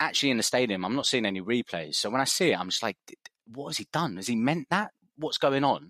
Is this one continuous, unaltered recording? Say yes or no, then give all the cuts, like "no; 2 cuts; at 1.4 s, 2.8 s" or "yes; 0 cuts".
yes; 0 cuts